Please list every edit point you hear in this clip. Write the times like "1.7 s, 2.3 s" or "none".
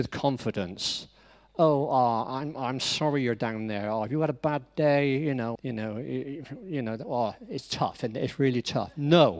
5.6 s